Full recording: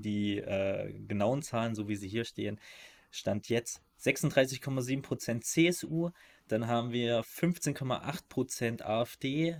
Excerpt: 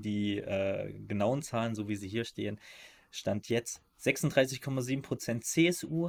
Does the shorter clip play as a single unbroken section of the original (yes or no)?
yes